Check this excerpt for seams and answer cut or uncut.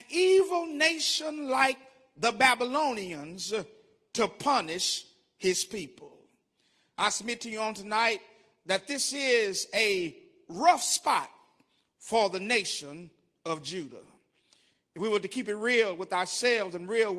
uncut